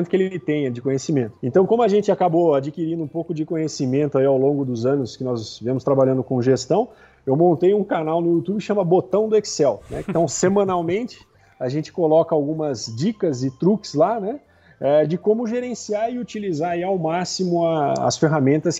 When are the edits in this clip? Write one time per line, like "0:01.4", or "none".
none